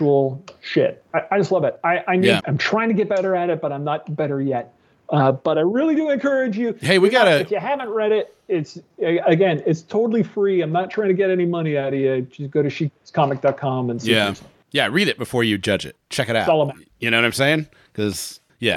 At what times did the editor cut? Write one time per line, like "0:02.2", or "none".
0:02.4